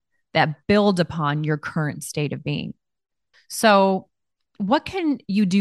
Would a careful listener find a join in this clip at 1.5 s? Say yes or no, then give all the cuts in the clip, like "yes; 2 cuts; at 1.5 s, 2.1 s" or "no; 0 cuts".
no; 1 cut; at 3.3 s